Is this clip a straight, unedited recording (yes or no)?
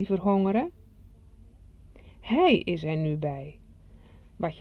yes